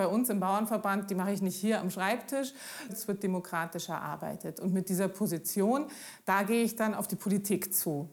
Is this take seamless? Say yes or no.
no